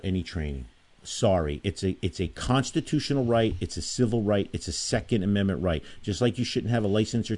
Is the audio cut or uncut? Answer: uncut